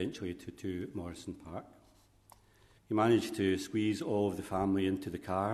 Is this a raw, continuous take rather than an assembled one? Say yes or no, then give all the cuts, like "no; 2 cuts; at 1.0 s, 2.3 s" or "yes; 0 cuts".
no; 1 cut; at 2.8 s